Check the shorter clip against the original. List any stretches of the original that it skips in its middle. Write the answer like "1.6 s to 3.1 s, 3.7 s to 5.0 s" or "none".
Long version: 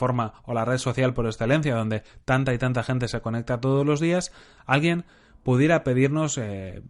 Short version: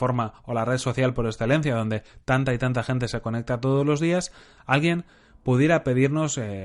none